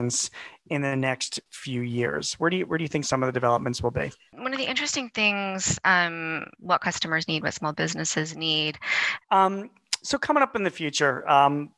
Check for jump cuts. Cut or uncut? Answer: cut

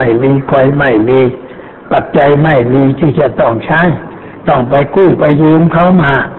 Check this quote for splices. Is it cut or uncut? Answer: uncut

